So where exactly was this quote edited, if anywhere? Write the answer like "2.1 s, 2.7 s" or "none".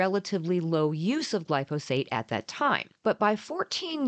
3.0 s